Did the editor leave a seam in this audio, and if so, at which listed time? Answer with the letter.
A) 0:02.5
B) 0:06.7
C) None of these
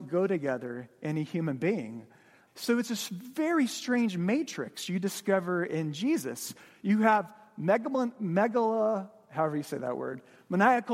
A